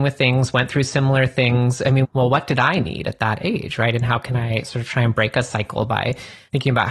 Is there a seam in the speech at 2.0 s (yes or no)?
yes